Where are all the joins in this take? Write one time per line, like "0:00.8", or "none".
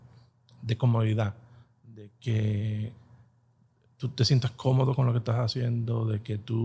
none